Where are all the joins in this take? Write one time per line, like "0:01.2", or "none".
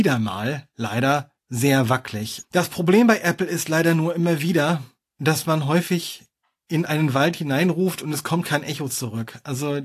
0:02.4

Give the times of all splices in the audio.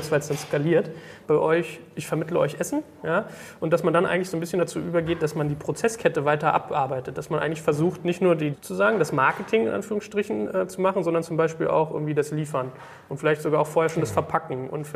0:01.2
0:08.5

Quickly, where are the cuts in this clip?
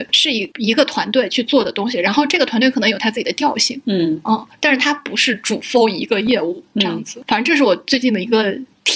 none

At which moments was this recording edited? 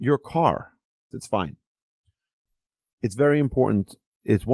0:01.1

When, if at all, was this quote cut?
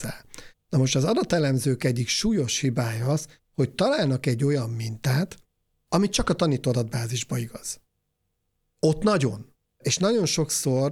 0:09.7

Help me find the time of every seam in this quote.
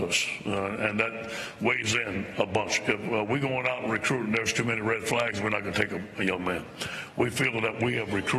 none

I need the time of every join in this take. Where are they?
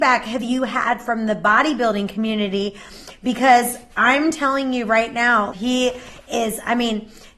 0:05.5

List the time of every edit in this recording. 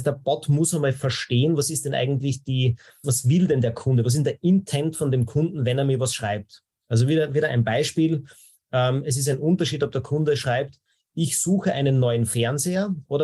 0:03.0

